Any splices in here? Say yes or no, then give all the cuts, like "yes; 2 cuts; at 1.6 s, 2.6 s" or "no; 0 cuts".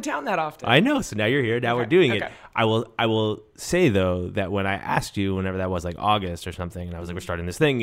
no; 0 cuts